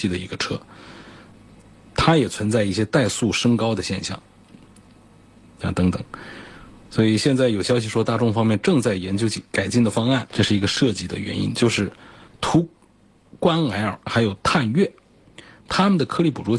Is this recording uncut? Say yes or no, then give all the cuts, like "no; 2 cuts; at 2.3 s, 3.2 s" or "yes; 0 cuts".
no; 1 cut; at 10.3 s